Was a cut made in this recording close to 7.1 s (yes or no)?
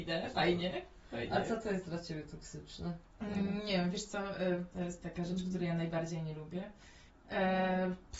yes